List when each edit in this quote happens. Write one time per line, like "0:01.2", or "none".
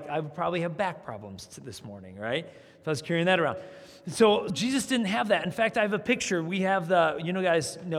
0:04.5